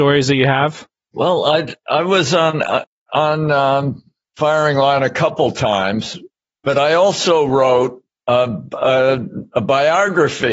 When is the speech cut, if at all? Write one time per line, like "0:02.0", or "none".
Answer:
none